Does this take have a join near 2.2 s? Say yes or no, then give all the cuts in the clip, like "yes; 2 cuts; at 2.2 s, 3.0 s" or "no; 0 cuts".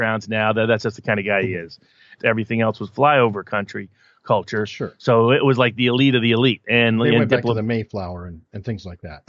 yes; 1 cut; at 2.2 s